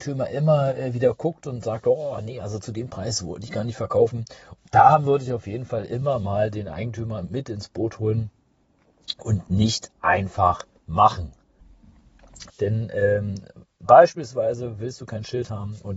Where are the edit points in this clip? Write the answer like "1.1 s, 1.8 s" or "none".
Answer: 4.6 s, 12.5 s